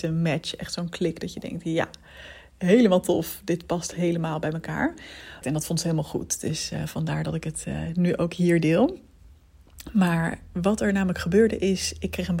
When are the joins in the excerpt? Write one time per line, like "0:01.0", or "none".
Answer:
0:05.4